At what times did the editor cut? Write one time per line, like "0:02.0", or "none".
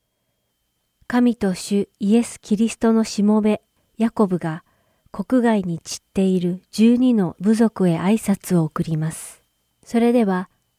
0:09.7